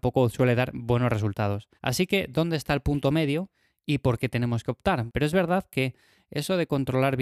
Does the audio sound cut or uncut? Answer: cut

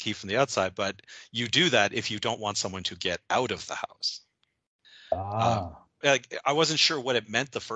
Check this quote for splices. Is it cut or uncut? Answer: cut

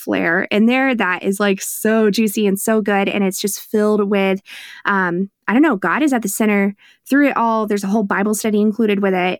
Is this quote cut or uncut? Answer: uncut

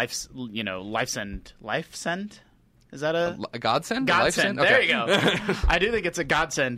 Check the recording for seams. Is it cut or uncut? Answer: uncut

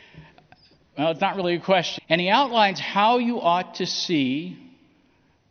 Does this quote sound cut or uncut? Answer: cut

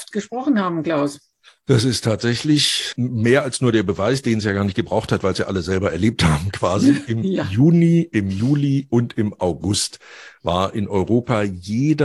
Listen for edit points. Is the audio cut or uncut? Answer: cut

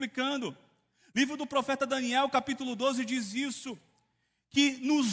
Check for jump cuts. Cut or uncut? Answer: uncut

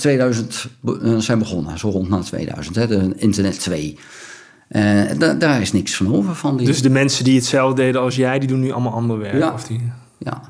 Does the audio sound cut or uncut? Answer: uncut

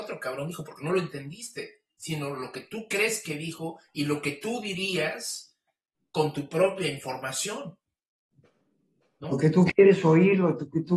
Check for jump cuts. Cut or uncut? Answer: uncut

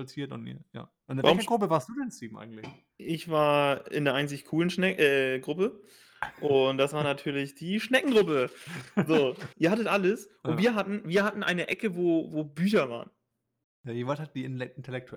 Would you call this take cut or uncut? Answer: cut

